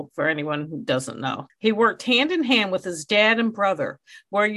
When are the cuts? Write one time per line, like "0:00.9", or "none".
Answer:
0:01.5